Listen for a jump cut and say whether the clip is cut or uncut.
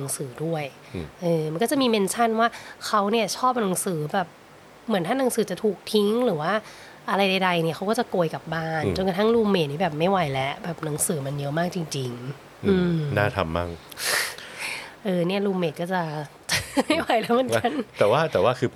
uncut